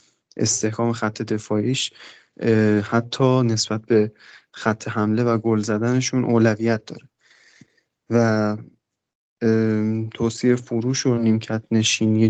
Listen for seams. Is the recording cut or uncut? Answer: uncut